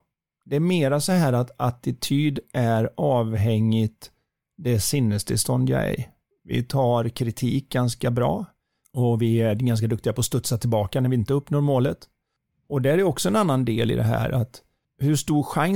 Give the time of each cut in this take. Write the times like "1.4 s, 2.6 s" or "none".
6.3 s, 8.8 s